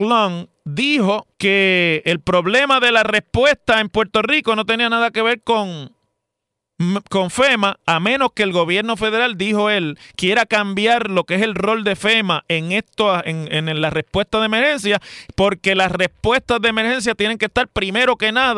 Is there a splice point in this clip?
yes; 1 cut; at 1.3 s

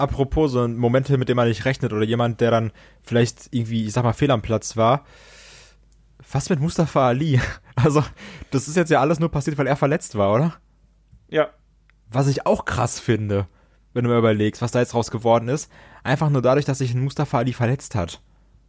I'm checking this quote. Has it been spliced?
no; 0 cuts

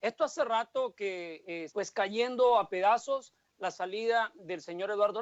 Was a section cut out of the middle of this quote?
yes; 1 cut; at 1.7 s

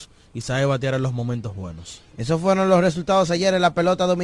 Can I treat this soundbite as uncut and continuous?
yes; 0 cuts

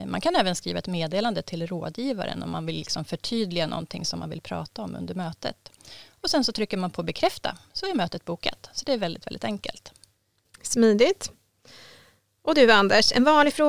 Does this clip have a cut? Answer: no; 0 cuts

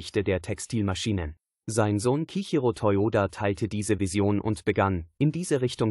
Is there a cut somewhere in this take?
yes; 1 cut; at 1.5 s

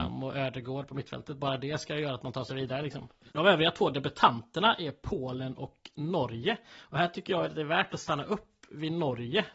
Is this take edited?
yes; 1 cut; at 3.3 s

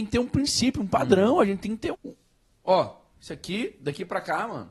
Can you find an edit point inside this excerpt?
yes; 1 cut; at 1.9 s

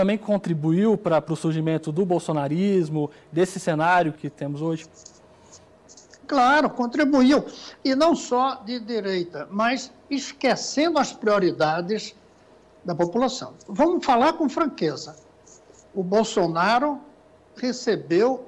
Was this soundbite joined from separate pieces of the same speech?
yes; 1 cut; at 4.2 s

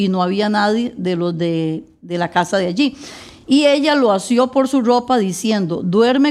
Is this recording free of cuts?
yes; 0 cuts

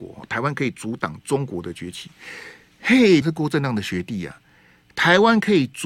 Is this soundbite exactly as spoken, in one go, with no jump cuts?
no; 1 cut; at 3.2 s

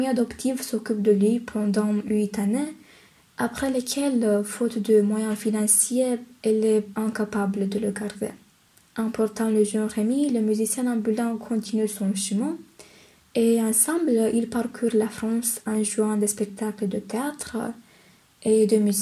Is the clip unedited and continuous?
no; 1 cut; at 8.8 s

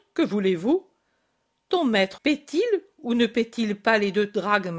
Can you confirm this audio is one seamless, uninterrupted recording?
no; 1 cut; at 2.2 s

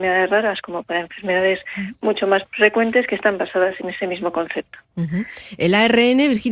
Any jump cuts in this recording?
no; 0 cuts

